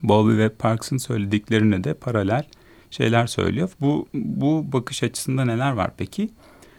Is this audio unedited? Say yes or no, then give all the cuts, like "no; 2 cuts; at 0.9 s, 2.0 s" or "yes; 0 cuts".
no; 1 cut; at 3.7 s